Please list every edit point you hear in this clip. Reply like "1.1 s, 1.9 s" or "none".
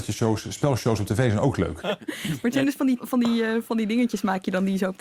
1.8 s, 3.0 s